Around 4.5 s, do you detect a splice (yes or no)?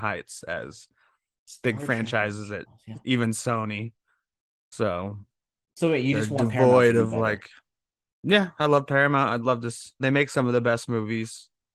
no